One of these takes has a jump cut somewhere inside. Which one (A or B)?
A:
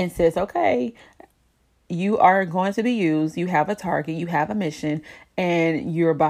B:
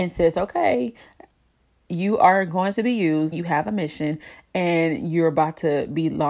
B